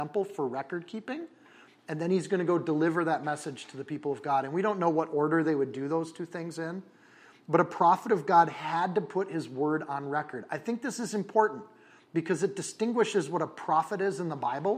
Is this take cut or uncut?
uncut